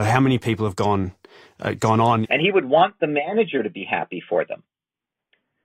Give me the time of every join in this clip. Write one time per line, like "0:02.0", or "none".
0:02.2